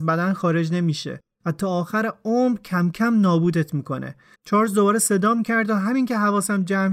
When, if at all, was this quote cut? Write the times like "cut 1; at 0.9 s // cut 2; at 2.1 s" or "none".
cut 1; at 4.3 s